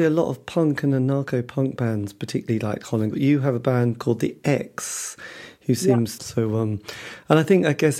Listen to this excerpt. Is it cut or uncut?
cut